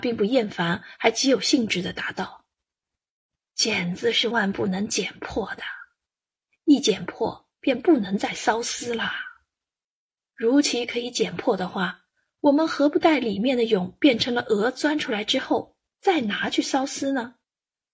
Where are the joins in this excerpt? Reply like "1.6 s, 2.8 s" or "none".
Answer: 4.3 s